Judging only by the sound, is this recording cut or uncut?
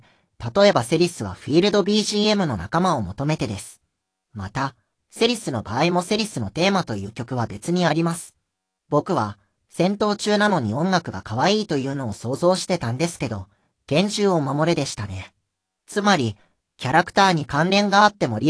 cut